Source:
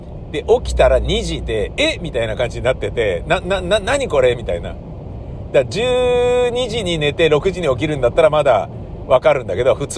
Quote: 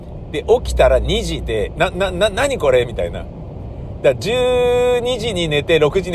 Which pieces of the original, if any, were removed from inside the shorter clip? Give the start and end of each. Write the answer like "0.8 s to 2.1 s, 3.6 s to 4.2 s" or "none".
1.7 s to 3.2 s